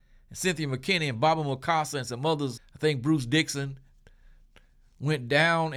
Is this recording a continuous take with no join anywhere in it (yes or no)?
no